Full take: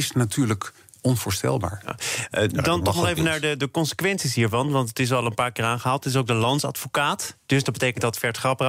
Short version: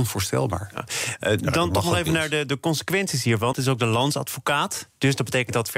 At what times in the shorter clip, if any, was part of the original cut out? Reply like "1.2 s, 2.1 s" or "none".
3.5 s